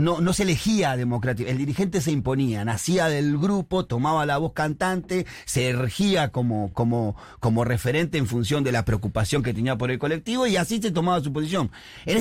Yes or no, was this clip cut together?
no